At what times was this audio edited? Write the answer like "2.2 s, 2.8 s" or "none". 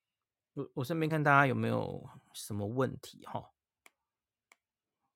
1.1 s